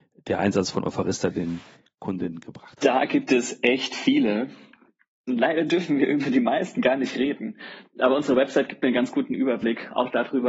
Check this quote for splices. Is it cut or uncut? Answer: uncut